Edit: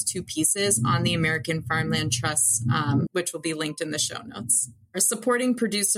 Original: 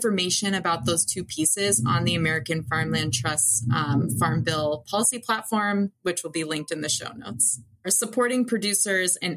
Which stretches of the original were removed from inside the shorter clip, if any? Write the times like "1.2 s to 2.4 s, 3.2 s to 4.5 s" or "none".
4.1 s to 6.0 s